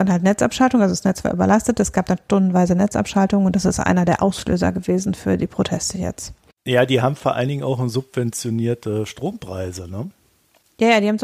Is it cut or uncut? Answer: uncut